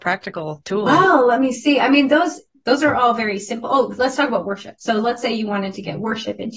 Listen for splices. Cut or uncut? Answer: uncut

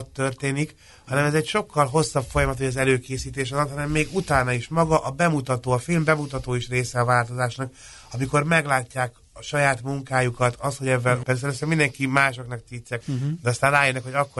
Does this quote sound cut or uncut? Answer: cut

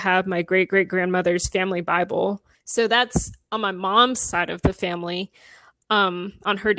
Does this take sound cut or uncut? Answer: cut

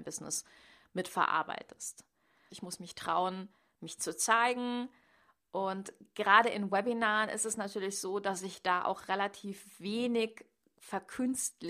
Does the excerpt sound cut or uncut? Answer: cut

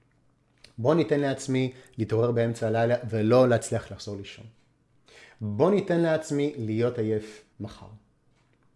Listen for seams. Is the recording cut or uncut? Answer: cut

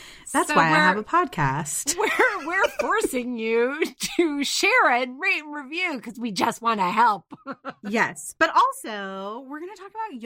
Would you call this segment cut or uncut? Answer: uncut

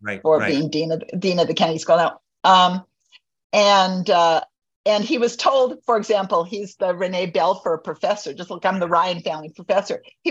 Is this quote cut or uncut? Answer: uncut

